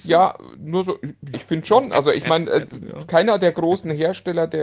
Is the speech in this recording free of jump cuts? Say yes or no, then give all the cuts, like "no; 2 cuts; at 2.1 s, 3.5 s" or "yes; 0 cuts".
no; 1 cut; at 1.3 s